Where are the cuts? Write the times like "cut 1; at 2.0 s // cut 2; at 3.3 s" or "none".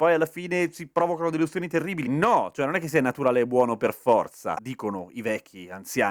cut 1; at 4.5 s